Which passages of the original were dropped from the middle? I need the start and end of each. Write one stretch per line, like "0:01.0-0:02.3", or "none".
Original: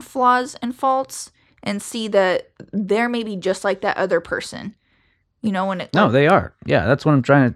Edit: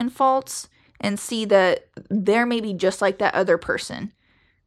none